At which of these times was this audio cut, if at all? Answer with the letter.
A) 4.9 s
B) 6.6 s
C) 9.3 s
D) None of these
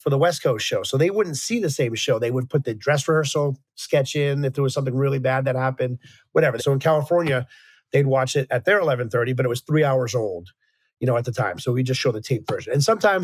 B